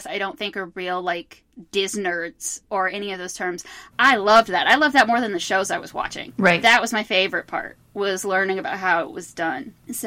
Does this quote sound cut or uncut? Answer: cut